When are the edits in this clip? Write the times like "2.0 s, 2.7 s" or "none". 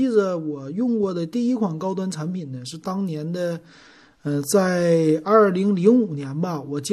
none